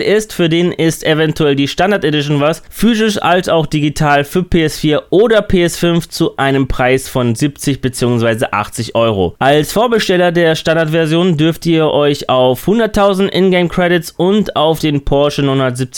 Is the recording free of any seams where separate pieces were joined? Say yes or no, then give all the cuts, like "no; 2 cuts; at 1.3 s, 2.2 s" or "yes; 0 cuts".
no; 1 cut; at 9.4 s